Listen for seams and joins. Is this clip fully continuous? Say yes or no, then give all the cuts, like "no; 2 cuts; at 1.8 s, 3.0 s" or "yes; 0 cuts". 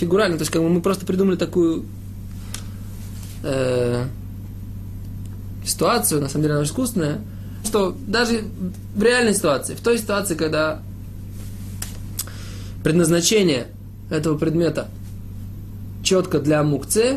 no; 2 cuts; at 6.6 s, 7.6 s